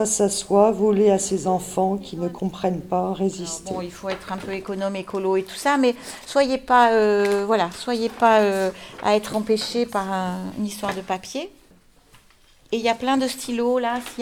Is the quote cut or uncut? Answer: uncut